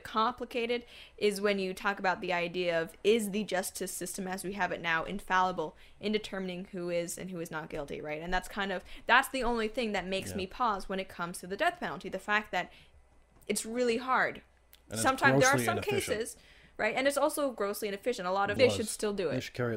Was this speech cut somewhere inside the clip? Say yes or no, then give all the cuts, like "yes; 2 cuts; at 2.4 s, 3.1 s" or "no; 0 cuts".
yes; 1 cut; at 18.6 s